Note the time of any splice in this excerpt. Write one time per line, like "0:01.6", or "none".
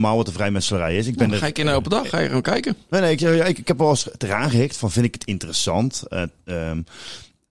none